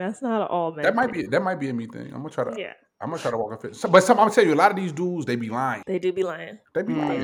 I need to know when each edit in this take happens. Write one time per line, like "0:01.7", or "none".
none

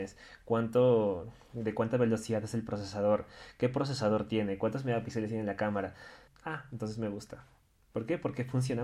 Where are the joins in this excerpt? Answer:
0:06.3

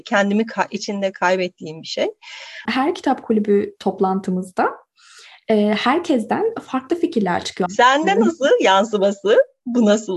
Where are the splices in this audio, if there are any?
0:02.7
0:07.7

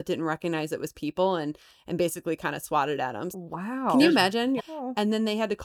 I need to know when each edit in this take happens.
0:03.3
0:04.6

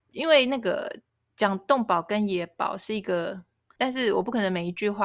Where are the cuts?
0:03.8

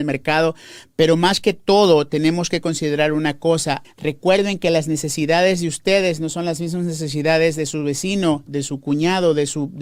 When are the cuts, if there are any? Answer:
0:03.8
0:08.5

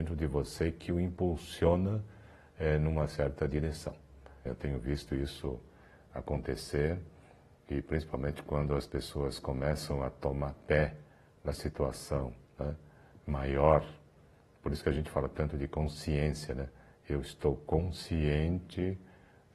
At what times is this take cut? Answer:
0:04.5

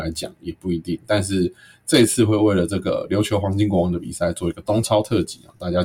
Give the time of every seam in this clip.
none

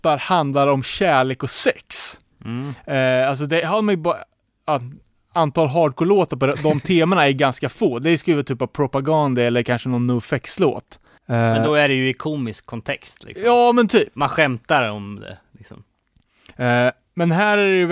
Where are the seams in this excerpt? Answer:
none

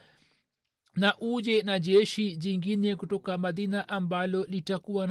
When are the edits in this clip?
none

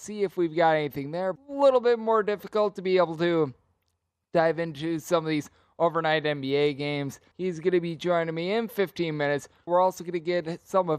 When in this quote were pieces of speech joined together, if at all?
0:01.4
0:07.3
0:09.7

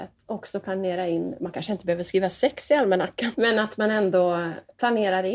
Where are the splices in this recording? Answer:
0:03.3

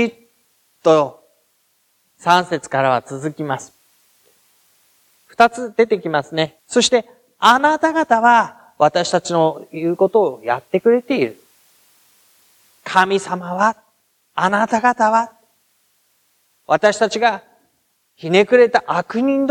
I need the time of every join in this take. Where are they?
0:06.6

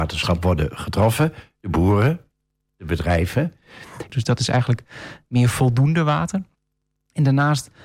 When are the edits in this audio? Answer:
0:02.6
0:04.1

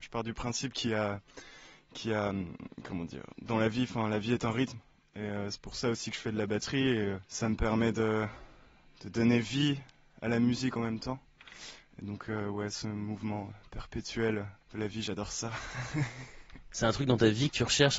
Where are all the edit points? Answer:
0:07.2
0:14.6

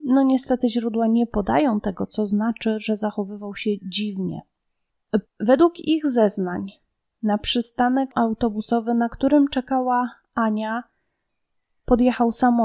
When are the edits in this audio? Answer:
0:05.3

